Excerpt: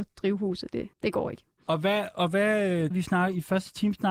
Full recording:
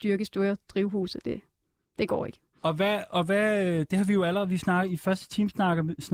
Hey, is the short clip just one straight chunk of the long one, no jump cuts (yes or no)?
no